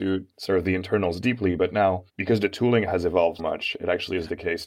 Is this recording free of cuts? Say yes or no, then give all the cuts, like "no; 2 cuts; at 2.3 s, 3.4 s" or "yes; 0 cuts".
no; 2 cuts; at 2.1 s, 3.4 s